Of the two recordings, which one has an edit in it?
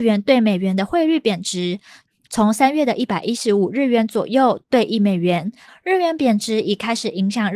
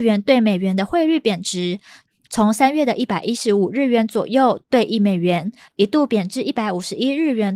first; 1 cut; at 5.7 s

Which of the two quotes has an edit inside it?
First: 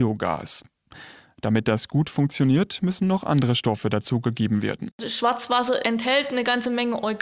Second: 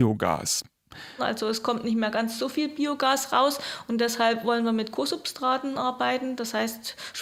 second; 1 cut; at 1.2 s

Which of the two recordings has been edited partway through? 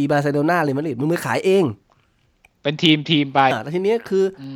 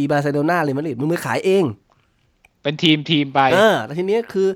first; 1 cut; at 3.5 s

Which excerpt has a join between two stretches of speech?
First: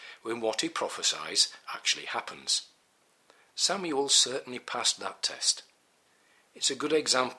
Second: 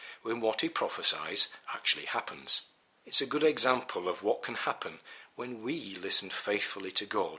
second; 1 cut; at 3.0 s

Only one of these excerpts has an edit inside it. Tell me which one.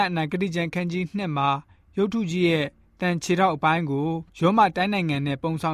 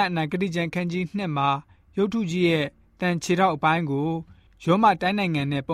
first; 1 cut; at 4.3 s

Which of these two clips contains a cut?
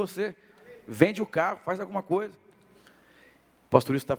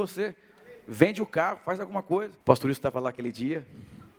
second; 1 cut; at 2.4 s

